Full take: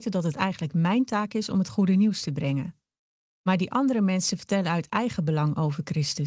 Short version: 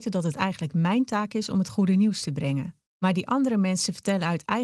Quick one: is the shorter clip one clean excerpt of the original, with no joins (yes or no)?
no